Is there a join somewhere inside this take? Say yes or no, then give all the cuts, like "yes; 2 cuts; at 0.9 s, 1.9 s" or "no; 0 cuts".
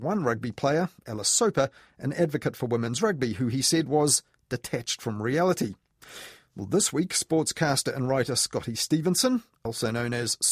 no; 0 cuts